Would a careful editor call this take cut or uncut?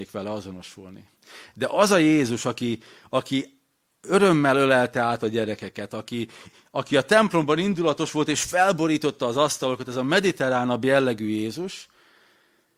uncut